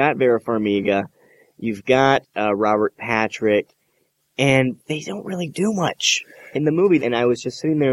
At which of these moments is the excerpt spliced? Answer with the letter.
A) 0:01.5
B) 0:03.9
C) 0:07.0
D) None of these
C